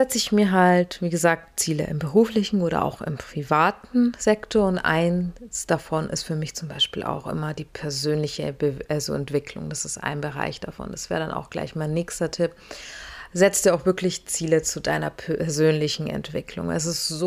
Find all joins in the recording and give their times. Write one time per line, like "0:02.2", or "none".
none

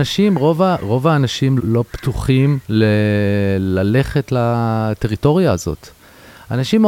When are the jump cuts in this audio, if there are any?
0:01.6
0:02.6

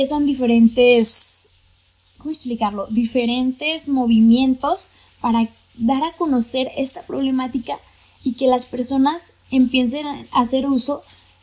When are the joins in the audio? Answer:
none

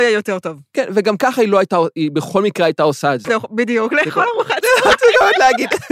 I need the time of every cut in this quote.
0:03.2

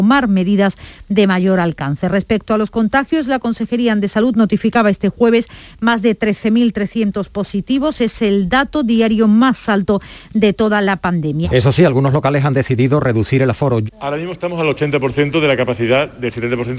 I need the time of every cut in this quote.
0:11.4
0:13.9

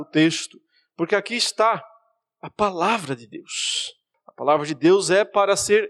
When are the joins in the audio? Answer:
0:04.1

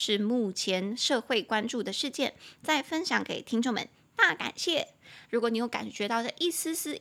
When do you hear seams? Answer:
0:05.2

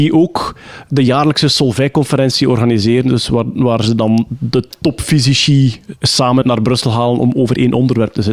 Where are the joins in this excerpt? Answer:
0:06.4

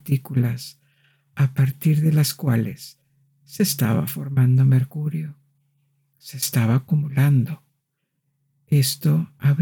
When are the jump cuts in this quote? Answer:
none

